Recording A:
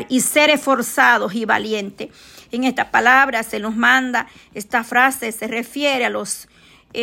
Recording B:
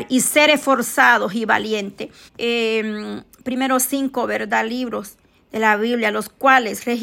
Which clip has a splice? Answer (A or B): B